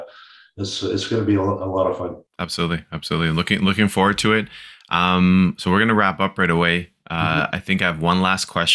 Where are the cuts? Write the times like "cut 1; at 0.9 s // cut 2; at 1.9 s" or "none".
cut 1; at 2.3 s